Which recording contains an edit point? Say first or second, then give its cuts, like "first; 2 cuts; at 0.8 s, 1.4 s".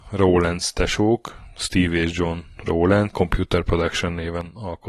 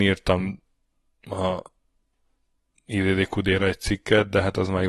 first; 1 cut; at 3.1 s